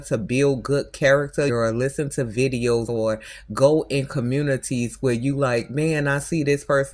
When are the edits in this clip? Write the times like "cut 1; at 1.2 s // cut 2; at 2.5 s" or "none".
cut 1; at 1.5 s // cut 2; at 2.9 s